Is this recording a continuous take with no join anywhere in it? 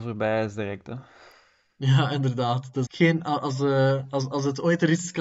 no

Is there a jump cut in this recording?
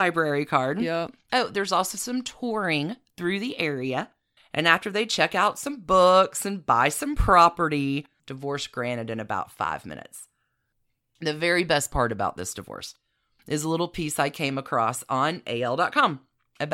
yes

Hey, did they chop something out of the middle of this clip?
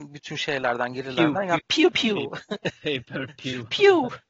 yes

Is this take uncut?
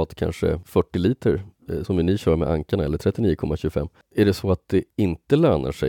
no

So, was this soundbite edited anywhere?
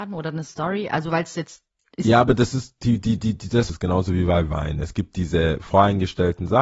yes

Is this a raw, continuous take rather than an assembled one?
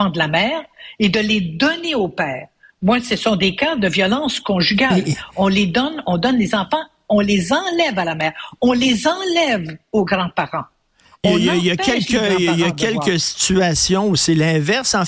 yes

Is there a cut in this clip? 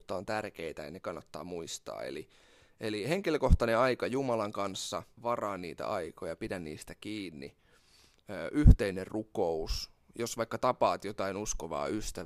yes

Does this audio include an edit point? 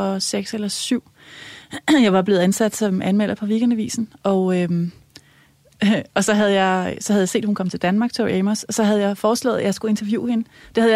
no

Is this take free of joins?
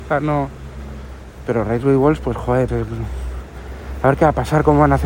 no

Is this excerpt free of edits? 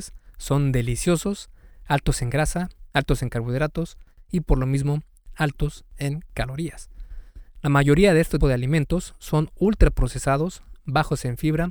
no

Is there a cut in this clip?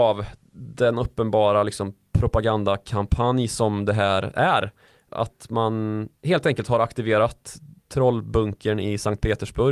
no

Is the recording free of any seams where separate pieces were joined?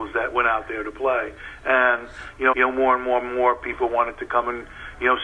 no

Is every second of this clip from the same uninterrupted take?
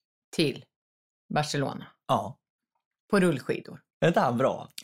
no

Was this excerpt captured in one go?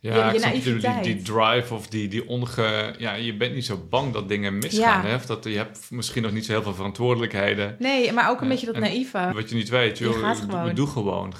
no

